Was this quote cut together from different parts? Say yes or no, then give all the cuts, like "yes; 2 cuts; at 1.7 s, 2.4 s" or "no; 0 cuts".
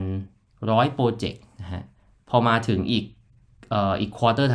no; 0 cuts